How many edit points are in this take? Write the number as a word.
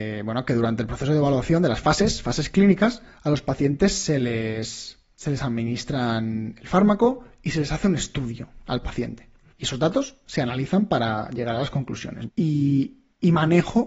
two